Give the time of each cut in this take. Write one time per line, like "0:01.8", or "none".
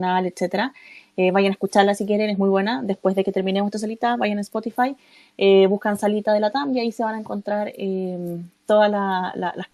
none

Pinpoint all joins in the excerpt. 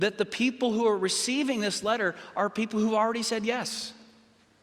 none

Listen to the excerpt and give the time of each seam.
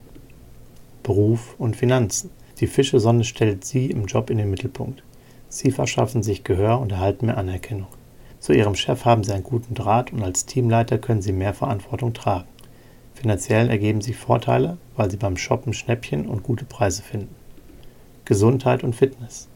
none

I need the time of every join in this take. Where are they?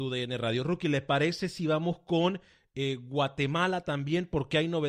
none

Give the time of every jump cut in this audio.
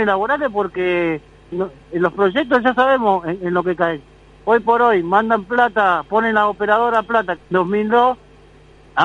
0:01.5
0:07.4

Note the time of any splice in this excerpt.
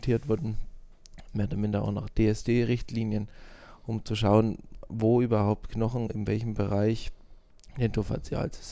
none

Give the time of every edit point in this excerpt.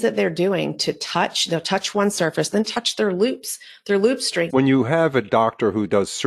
0:02.5
0:04.5

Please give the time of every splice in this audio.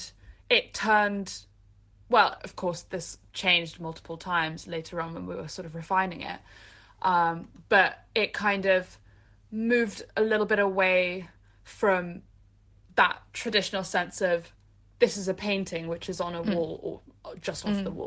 0:02.4

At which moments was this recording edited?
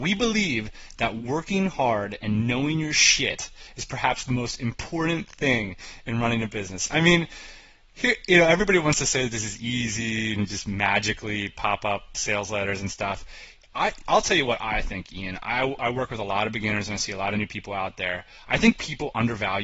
none

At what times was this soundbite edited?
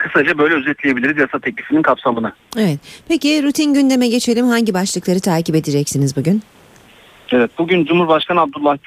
none

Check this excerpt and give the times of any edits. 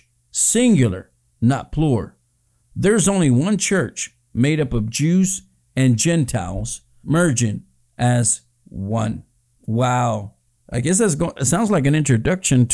0:10.5

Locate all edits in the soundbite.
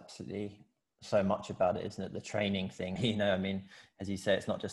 0:03.0

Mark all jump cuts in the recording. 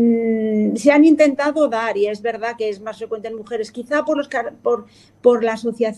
none

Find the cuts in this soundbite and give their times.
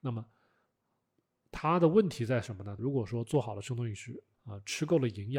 0:02.8
0:04.3

